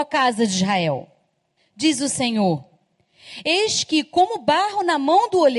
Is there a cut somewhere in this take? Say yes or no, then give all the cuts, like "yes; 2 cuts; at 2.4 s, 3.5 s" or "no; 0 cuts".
yes; 1 cut; at 1.6 s